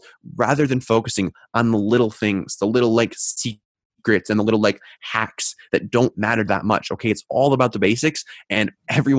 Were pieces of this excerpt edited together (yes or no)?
no